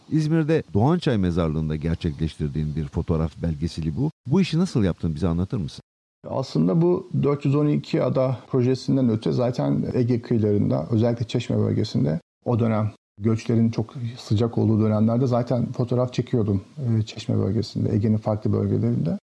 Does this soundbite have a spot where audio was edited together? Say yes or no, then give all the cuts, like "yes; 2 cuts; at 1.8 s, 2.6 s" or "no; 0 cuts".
no; 0 cuts